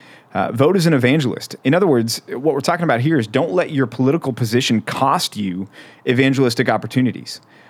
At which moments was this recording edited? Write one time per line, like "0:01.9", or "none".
none